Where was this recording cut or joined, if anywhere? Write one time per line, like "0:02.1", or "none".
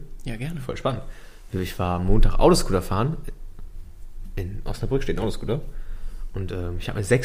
none